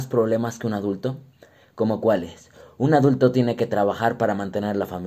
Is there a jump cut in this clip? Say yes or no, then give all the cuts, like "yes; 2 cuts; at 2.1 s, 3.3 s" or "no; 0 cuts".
no; 0 cuts